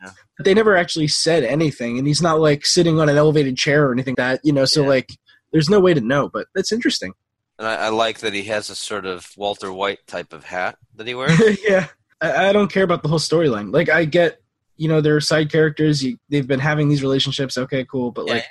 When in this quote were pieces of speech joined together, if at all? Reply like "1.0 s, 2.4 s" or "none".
4.1 s, 12.1 s